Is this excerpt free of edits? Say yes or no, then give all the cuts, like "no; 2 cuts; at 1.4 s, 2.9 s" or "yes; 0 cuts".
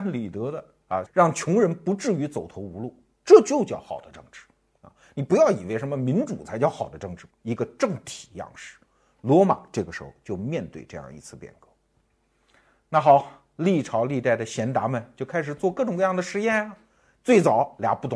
no; 2 cuts; at 1.1 s, 7.3 s